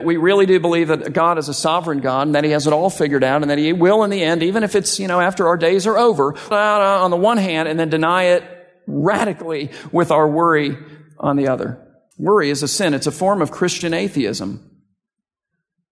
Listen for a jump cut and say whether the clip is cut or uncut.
cut